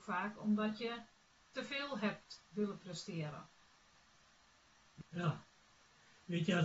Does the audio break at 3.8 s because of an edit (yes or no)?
no